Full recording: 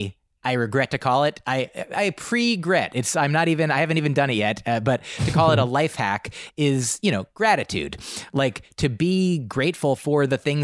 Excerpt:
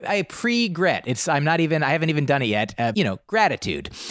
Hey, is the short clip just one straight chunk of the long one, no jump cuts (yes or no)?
no